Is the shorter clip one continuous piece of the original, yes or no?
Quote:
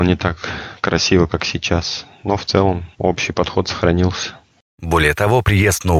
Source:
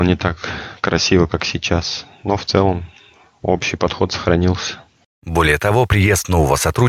no